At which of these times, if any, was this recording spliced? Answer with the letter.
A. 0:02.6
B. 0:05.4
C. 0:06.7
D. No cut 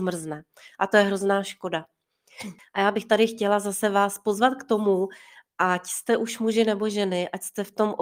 A